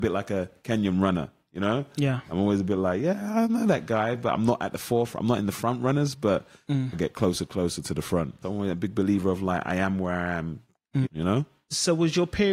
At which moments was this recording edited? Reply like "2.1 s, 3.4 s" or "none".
6.9 s, 8.4 s, 11.0 s

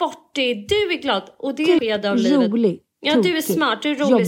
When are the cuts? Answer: 1.8 s

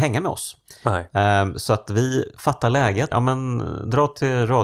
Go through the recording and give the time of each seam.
3.1 s

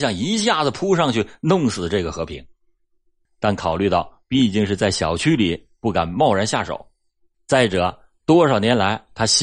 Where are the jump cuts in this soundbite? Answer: none

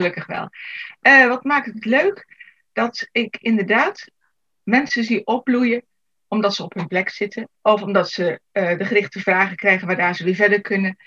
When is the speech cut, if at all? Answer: 7.6 s

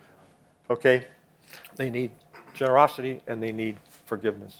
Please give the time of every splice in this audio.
1.6 s

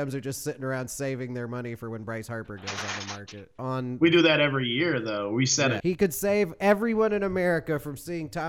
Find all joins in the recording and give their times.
3.6 s, 5.8 s

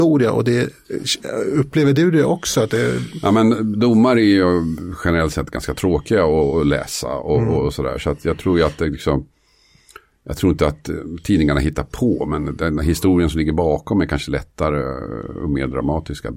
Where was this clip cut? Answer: none

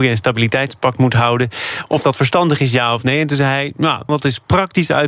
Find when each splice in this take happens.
4.1 s

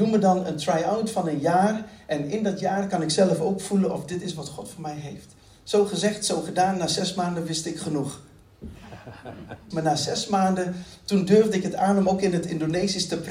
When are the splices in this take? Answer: 9.7 s

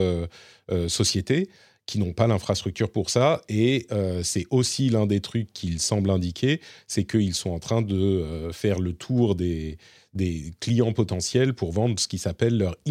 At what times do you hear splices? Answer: none

